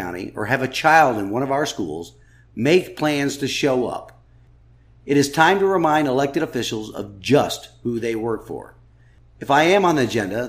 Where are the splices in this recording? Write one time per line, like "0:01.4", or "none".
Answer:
none